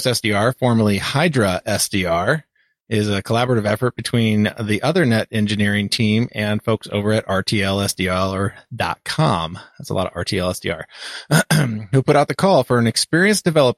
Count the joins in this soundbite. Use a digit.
0